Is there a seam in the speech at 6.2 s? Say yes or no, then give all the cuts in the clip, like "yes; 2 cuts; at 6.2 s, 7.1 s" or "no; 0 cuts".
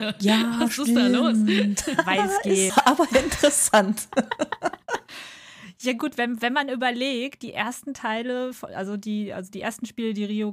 no; 1 cut; at 2.7 s